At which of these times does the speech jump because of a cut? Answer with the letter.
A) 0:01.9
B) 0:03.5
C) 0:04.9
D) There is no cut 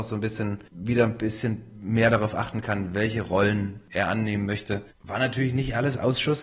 D